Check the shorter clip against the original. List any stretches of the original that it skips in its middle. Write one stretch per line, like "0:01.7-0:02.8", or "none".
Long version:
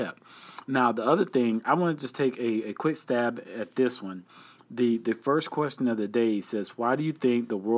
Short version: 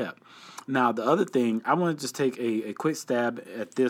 none